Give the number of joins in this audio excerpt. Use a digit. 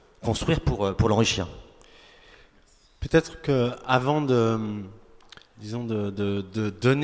0